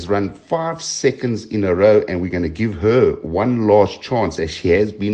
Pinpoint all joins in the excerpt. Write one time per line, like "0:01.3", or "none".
none